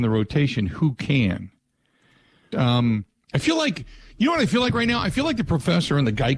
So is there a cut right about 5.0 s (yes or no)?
no